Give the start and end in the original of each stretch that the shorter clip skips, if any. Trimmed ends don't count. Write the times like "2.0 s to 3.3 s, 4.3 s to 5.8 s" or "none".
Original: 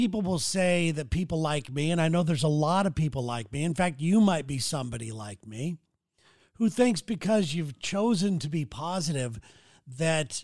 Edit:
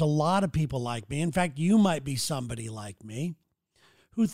none